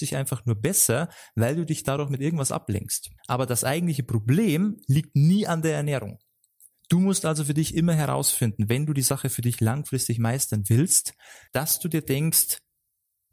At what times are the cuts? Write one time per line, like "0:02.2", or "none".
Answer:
0:03.2
0:11.5